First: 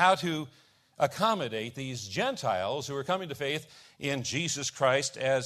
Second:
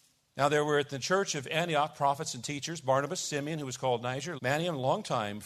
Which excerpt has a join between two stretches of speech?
second; 1 cut; at 4.4 s

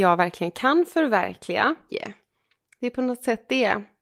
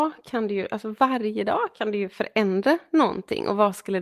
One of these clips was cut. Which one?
first; 1 cut; at 1.9 s

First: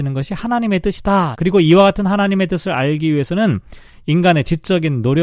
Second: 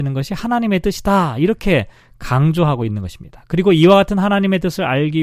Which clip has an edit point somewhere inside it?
first; 1 cut; at 1.3 s

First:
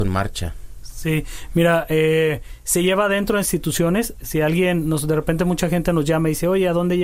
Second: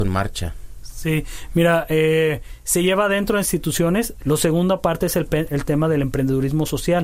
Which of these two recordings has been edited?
second; 1 cut; at 4.2 s

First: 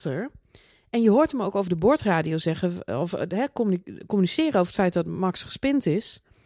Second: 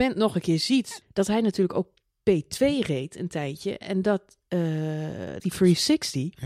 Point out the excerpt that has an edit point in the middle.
second; 2 cuts; at 1.0 s, 5.4 s

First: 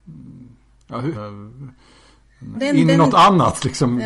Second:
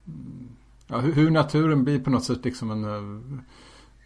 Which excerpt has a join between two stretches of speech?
first; 2 cuts; at 1.1 s, 2.5 s

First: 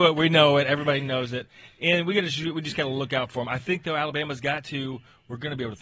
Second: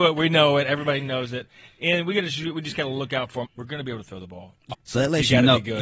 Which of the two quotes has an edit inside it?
second; 2 cuts; at 3.4 s, 4.7 s

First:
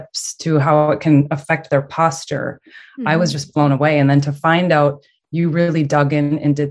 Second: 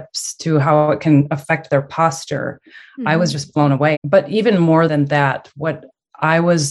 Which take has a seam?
second; 1 cut; at 3.9 s

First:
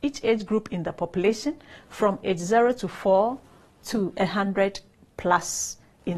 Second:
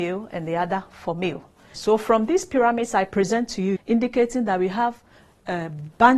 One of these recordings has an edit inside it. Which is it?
second; 2 cuts; at 1.7 s, 3.8 s

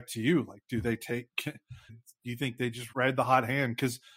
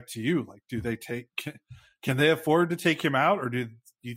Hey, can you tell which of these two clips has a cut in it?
first; 2 cuts; at 1.9 s, 2.9 s

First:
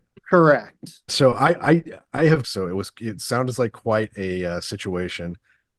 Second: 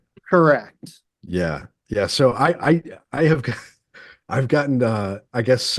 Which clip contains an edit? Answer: first; 2 cuts; at 1.1 s, 2.4 s

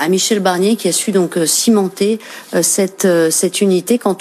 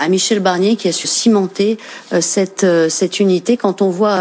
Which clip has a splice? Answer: second; 1 cut; at 1.0 s

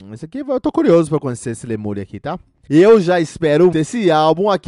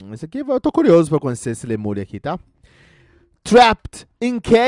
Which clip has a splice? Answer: first; 2 cuts; at 2.7 s, 3.7 s

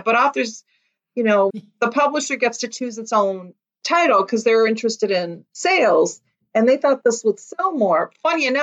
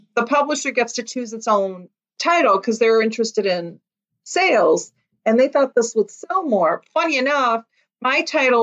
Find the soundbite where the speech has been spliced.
first; 2 cuts; at 1.5 s, 5.5 s

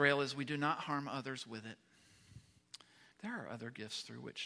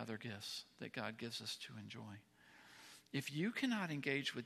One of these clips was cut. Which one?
first; 1 cut; at 3.1 s

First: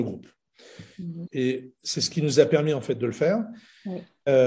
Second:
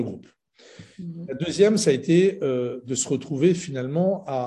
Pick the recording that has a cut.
first; 1 cut; at 1.3 s

